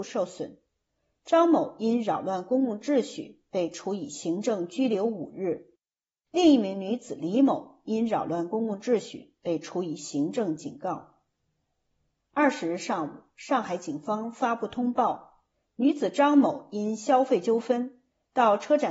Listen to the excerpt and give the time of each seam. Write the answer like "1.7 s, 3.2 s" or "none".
12.2 s